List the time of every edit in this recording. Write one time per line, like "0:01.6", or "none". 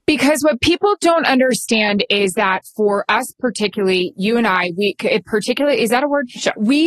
none